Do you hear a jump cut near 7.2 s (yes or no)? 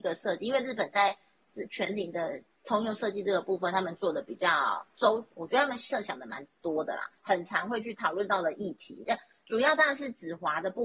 yes